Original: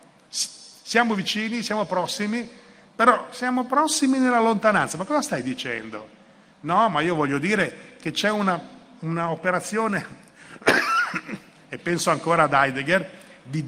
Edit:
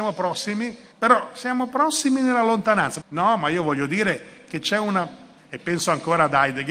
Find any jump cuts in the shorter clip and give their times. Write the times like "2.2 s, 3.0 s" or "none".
0.9 s, 3.0 s, 5.4 s